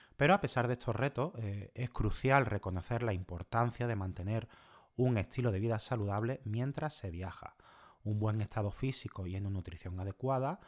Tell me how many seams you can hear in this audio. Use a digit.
0